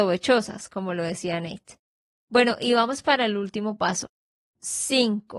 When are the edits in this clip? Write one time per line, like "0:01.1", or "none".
none